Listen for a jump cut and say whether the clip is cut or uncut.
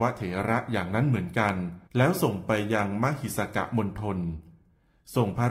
cut